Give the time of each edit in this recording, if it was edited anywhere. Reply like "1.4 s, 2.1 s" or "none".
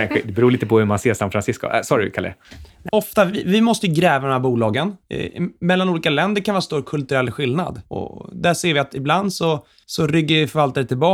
2.9 s